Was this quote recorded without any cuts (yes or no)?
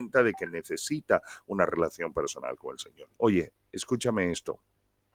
no